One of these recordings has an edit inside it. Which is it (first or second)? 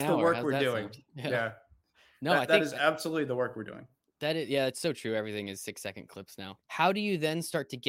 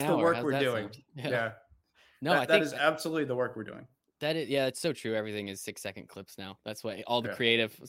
first